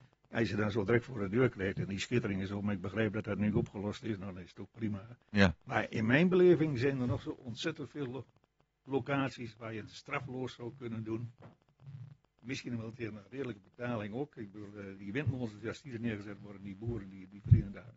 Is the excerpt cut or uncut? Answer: cut